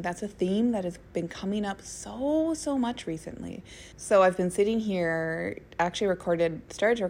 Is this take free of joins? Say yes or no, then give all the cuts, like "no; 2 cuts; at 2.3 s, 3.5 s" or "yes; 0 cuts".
no; 1 cut; at 3.9 s